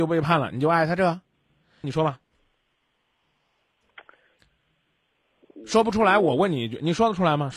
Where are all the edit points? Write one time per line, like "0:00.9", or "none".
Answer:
0:01.8